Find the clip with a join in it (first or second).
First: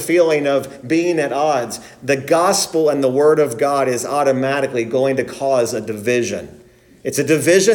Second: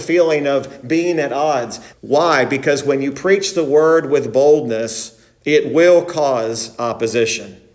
second